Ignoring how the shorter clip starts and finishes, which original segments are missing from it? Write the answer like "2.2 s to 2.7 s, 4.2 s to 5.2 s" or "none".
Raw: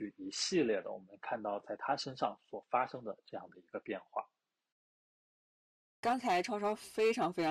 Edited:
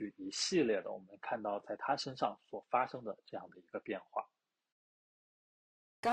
none